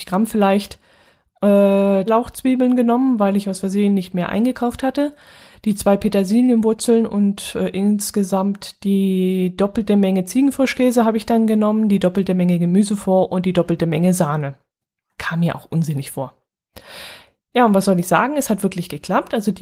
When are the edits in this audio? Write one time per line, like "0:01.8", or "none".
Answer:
0:02.1
0:15.1

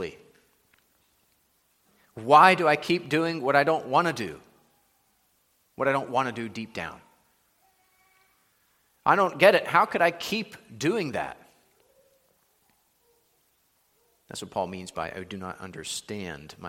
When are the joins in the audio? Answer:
none

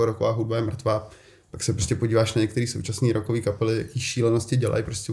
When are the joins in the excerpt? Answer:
none

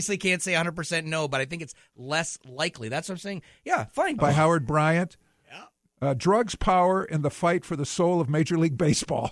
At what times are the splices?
0:04.2

